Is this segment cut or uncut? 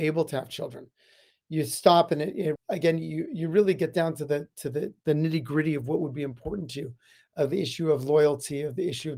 cut